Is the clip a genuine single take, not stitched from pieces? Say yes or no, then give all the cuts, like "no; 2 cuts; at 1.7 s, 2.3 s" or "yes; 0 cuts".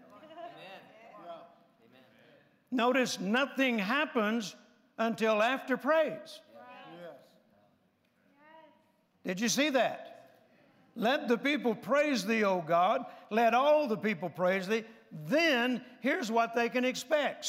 yes; 0 cuts